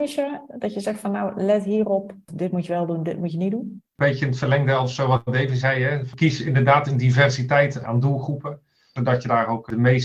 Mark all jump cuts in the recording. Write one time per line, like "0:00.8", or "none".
none